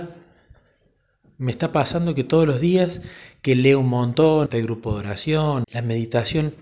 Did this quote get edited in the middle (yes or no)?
yes